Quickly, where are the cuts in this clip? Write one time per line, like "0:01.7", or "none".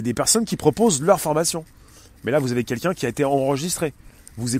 none